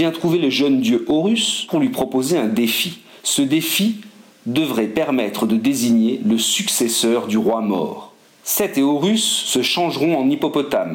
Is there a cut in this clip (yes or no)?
no